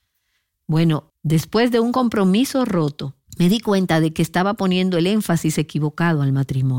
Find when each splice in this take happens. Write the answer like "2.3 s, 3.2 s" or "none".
1.1 s, 3.3 s